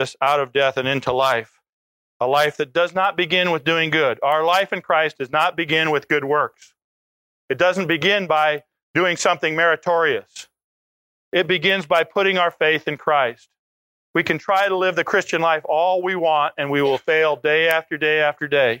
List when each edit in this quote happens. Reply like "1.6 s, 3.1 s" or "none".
none